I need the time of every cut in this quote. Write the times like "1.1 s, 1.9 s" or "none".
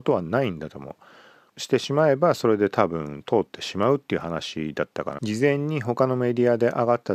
1.5 s, 5.2 s